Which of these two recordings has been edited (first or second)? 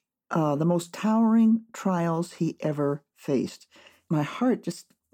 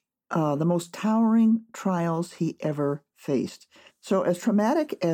second